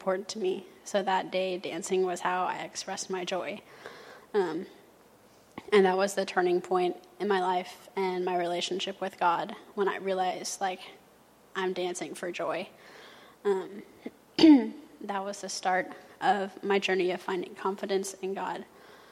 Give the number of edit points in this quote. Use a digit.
0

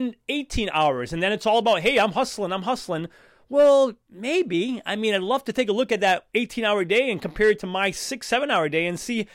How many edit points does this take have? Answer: 0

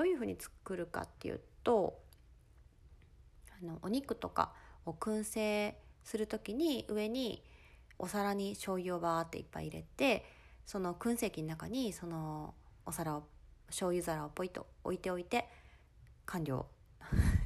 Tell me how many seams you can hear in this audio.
1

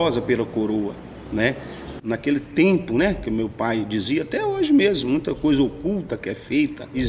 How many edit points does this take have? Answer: 1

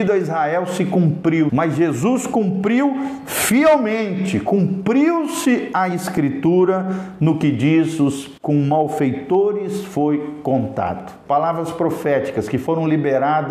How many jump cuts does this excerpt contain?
2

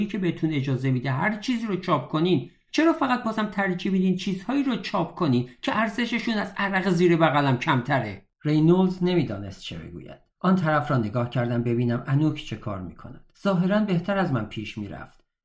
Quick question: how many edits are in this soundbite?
2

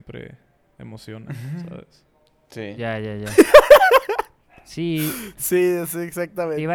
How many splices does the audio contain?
0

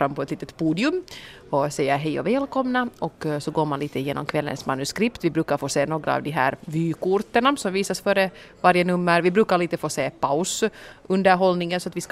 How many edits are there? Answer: 0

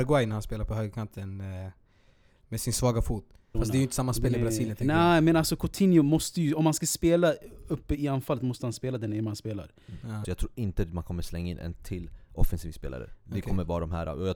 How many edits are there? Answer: 2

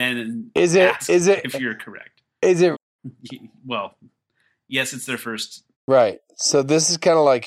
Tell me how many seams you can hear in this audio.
2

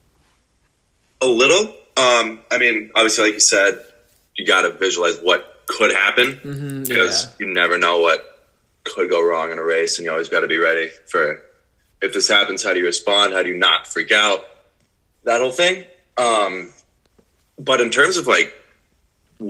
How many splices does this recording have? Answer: 0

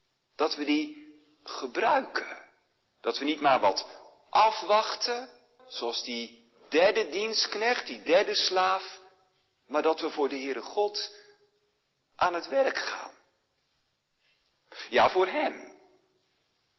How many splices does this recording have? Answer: 1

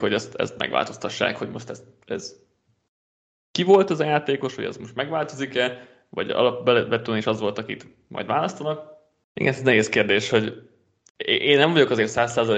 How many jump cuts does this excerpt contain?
1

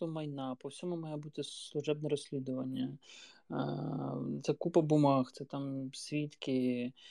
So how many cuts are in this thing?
1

